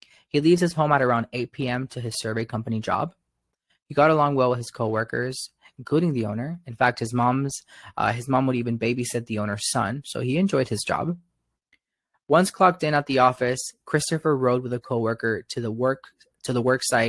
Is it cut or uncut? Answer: uncut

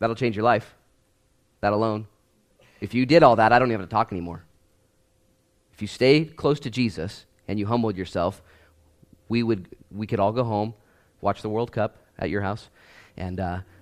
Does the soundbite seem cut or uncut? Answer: uncut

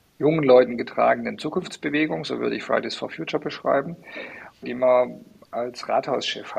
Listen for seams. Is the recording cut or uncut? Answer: cut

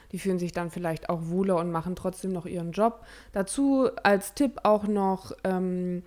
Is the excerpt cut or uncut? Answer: uncut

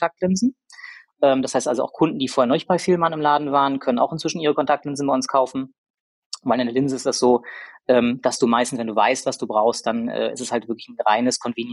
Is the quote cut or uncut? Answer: uncut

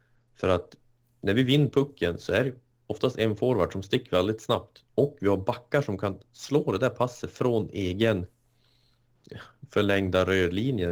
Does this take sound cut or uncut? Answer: uncut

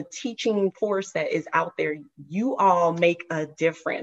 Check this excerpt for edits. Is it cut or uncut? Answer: uncut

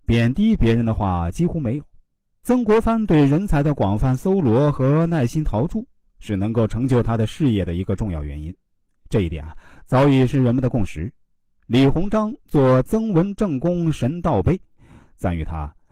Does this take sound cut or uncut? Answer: cut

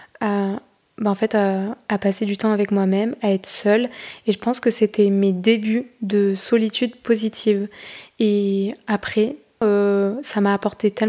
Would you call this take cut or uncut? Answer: cut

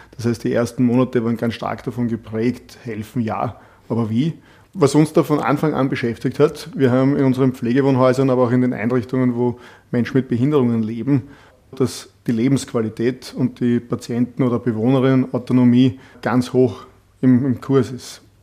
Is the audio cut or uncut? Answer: cut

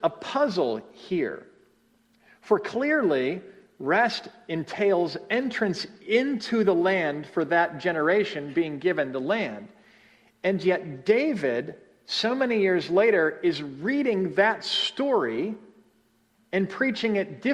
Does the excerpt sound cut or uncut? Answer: uncut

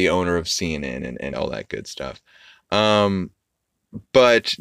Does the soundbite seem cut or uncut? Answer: cut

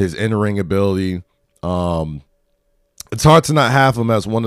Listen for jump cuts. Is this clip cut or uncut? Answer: uncut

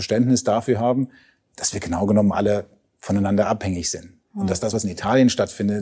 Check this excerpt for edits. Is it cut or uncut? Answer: uncut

